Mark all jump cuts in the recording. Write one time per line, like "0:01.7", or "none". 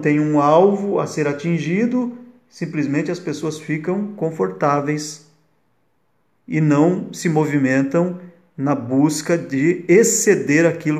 none